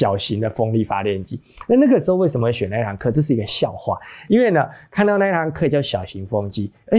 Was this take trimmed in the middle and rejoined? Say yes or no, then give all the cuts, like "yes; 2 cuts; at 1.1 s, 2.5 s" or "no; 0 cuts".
no; 0 cuts